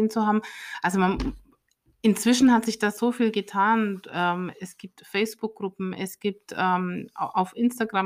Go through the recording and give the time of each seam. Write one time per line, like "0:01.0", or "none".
none